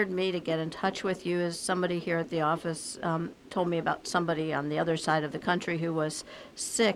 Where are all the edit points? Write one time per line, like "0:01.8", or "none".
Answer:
none